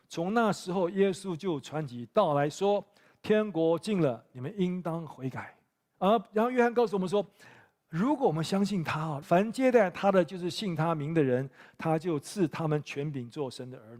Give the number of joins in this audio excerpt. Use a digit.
2